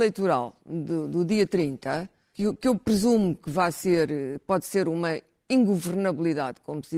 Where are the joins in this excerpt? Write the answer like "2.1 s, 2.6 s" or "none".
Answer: 2.3 s